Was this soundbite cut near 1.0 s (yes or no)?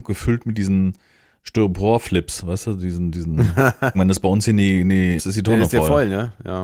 no